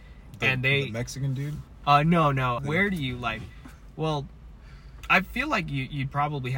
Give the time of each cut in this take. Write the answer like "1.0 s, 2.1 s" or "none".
2.6 s